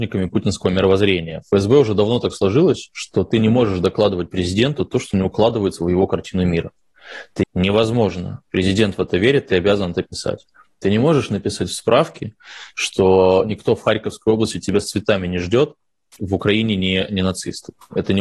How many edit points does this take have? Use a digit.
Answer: 2